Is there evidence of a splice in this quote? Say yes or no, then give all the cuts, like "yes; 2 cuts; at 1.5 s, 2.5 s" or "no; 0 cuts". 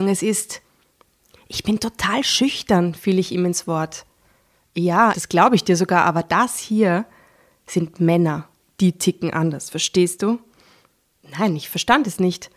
yes; 1 cut; at 5.1 s